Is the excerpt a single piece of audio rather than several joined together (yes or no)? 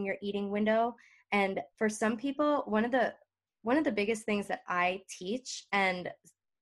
no